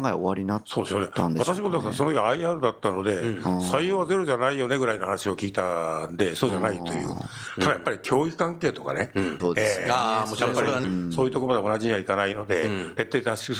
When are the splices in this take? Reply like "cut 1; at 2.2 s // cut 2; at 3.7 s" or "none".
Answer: cut 1; at 9.4 s // cut 2; at 10.8 s